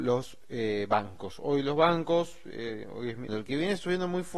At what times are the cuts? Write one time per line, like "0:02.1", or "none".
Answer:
0:03.3